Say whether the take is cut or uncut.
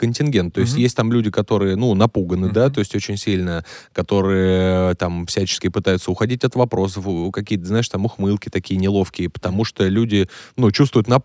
uncut